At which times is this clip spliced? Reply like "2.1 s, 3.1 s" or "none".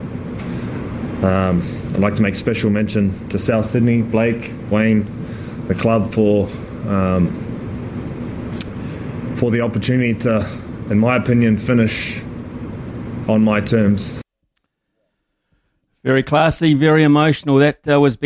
none